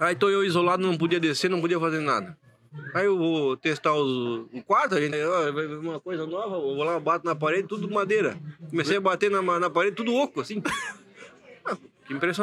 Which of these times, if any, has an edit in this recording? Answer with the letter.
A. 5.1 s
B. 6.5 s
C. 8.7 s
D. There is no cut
A